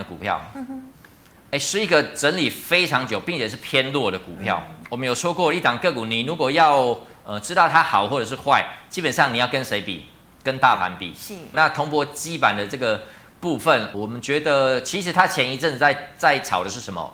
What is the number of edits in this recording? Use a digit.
2